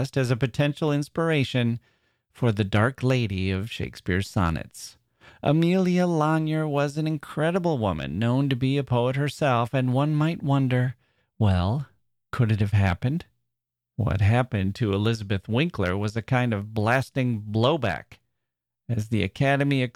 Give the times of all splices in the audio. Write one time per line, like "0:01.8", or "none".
none